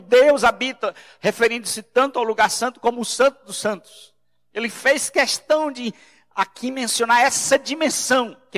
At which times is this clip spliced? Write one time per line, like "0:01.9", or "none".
none